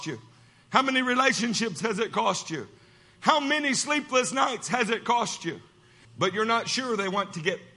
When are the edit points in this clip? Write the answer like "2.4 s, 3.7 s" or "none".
6.0 s